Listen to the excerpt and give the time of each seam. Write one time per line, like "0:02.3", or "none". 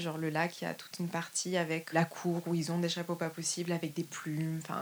0:01.9